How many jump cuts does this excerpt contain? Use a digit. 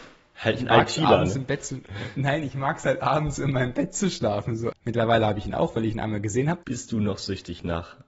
2